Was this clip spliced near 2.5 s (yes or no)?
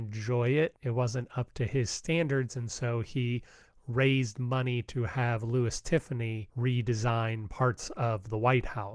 no